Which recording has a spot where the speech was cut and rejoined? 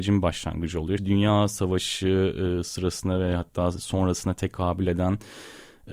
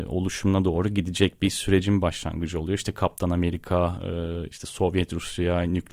first; 1 cut; at 1.0 s

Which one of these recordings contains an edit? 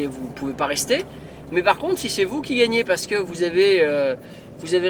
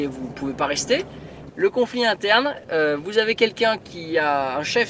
second; 1 cut; at 1.5 s

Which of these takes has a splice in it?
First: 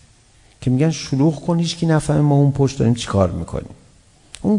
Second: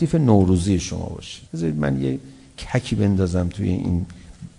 second; 1 cut; at 1.5 s

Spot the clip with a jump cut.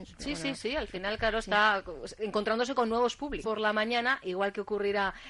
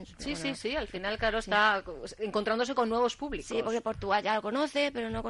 first; 1 cut; at 3.4 s

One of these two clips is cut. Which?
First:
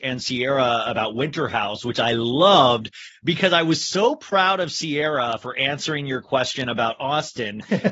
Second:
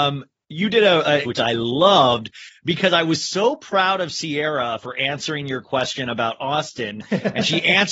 second; 1 cut; at 1.2 s

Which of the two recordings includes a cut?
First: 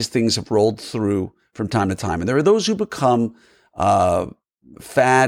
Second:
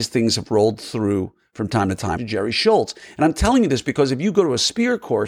second; 1 cut; at 2.2 s

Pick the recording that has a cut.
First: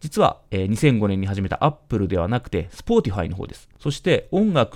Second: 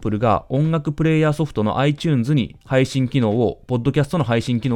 first; 1 cut; at 3.7 s

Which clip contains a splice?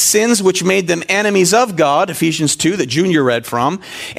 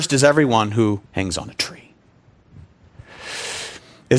second; 1 cut; at 1.1 s

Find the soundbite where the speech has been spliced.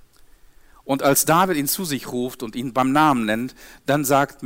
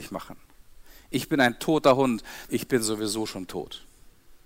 second; 1 cut; at 2.5 s

